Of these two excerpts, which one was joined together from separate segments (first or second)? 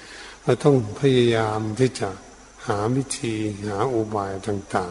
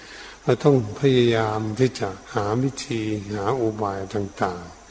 second